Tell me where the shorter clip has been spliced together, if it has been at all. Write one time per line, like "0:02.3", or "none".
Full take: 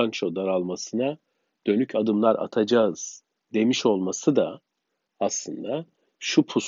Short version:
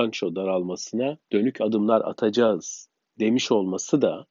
0:01.2